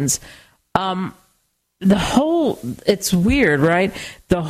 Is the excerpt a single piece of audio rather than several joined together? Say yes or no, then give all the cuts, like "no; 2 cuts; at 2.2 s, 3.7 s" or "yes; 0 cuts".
yes; 0 cuts